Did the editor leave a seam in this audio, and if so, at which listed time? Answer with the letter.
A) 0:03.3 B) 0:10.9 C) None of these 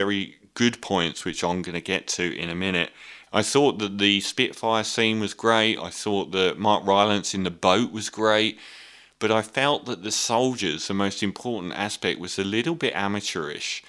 A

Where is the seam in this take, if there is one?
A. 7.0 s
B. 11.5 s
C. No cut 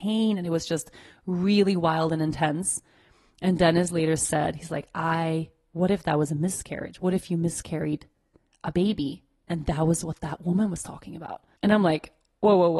B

